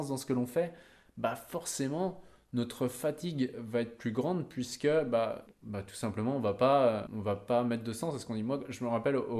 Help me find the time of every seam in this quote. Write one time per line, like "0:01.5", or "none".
0:05.5
0:07.1